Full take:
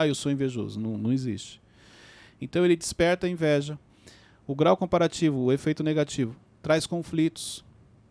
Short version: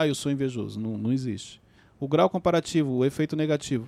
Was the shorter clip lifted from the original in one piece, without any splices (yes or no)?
no